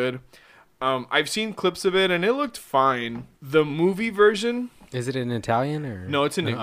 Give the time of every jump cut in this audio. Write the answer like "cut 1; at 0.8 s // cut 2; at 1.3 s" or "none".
cut 1; at 3.3 s